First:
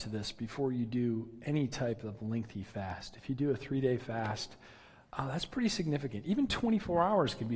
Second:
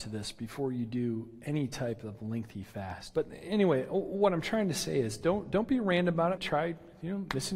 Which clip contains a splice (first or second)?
second